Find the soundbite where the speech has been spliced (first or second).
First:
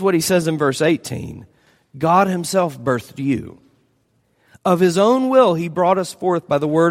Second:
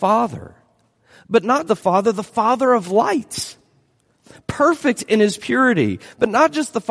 second